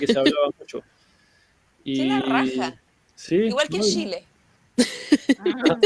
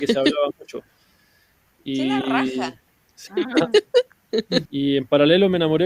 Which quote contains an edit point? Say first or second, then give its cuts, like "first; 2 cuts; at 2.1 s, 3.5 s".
second; 2 cuts; at 3.3 s, 4.7 s